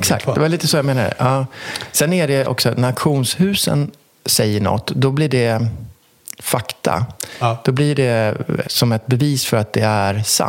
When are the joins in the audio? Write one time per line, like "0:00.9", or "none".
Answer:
0:08.6